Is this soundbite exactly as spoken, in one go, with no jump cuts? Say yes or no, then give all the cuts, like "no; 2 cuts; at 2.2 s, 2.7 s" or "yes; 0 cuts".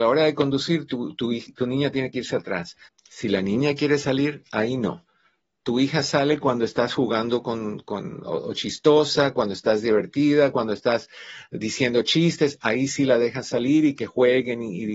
no; 2 cuts; at 2.9 s, 10.5 s